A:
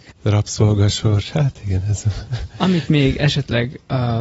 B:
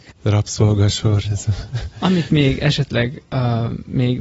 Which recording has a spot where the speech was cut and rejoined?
B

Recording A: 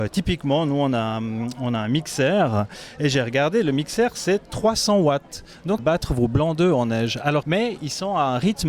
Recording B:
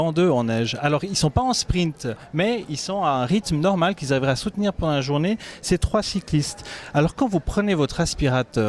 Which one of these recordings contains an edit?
A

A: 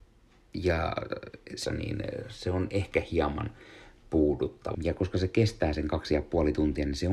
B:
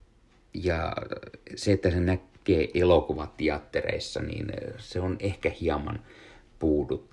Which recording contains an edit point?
A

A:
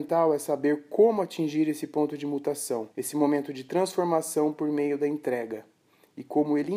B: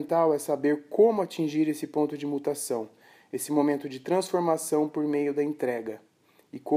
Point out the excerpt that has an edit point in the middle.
A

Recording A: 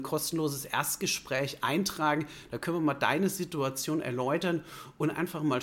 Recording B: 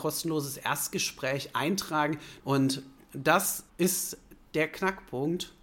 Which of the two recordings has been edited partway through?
B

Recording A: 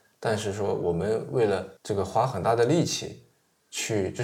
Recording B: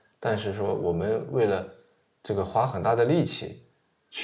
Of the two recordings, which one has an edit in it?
A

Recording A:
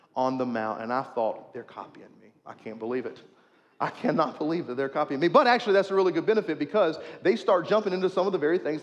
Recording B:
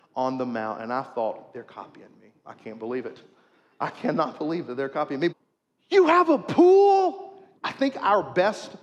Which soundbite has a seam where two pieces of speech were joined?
B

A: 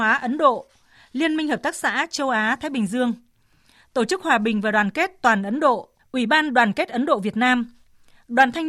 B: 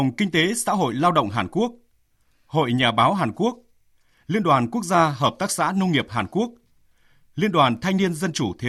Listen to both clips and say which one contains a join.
A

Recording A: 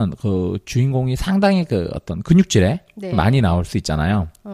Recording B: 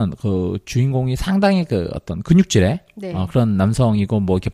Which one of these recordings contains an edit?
A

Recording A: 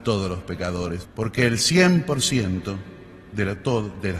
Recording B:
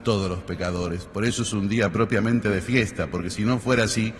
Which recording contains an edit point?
A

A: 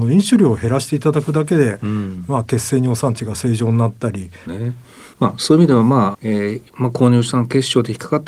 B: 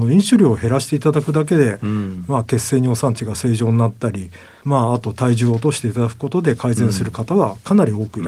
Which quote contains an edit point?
A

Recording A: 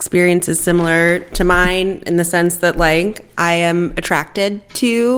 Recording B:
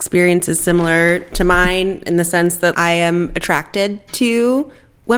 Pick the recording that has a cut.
B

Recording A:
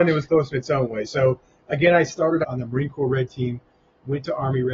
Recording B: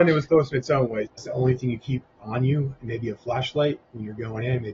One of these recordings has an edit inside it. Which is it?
B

